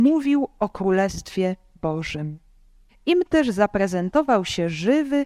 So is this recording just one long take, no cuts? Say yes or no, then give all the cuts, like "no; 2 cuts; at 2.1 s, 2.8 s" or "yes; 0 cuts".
no; 1 cut; at 2.9 s